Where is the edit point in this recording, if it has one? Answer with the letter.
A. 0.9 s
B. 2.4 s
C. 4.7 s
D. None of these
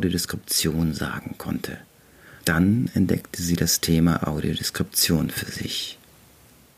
B